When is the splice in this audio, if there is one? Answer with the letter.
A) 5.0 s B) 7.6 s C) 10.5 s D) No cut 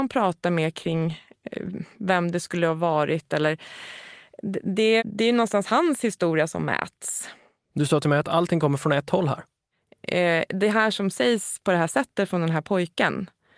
A